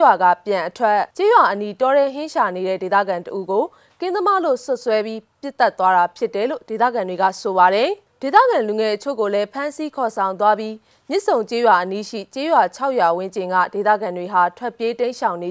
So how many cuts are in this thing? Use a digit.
1